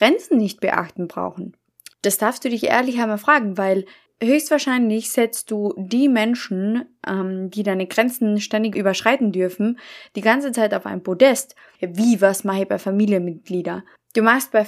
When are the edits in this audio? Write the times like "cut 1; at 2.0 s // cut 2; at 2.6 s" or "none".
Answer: cut 1; at 1.9 s // cut 2; at 11.8 s